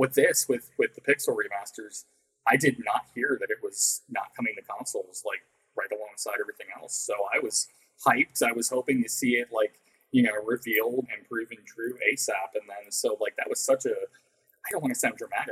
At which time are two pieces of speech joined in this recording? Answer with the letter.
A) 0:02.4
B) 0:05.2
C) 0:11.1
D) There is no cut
C